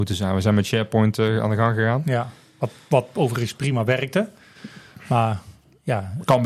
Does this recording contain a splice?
no; 0 cuts

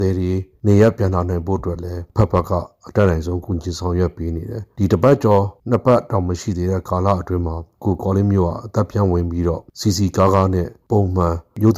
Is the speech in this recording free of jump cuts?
yes; 0 cuts

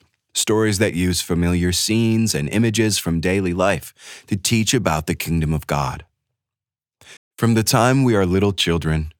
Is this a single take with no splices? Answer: no; 1 cut; at 7.2 s

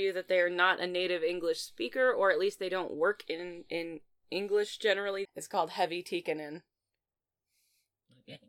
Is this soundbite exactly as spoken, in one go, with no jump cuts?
no; 1 cut; at 5.3 s

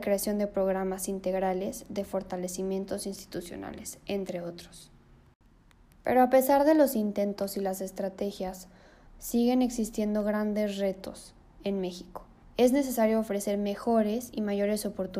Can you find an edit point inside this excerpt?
yes; 2 cuts; at 9.1 s, 12.4 s

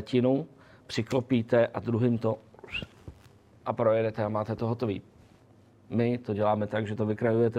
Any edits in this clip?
no; 0 cuts

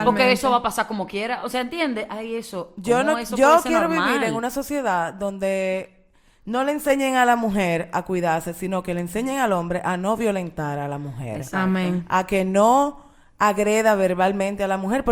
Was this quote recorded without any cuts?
yes; 0 cuts

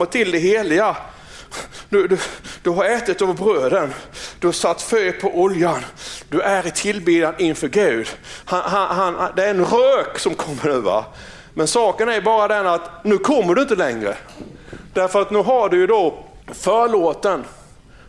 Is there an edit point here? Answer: yes; 2 cuts; at 8.4 s, 16.4 s

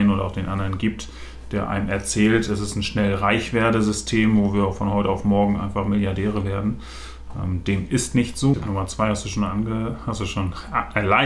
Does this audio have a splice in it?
yes; 1 cut; at 8.5 s

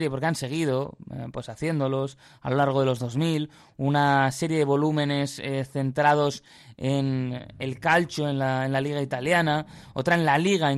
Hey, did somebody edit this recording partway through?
no; 0 cuts

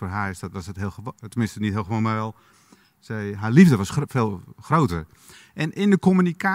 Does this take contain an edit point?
no; 0 cuts

